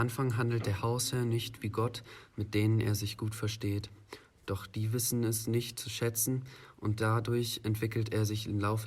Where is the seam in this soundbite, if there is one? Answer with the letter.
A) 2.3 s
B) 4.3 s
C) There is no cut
A